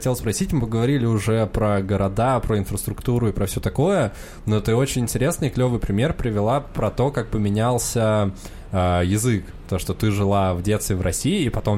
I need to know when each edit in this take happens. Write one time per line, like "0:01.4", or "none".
none